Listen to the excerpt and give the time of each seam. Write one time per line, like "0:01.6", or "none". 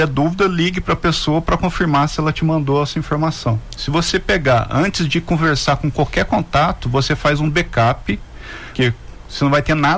0:03.8
0:08.7